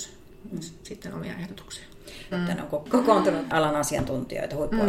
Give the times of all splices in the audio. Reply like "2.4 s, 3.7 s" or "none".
2.3 s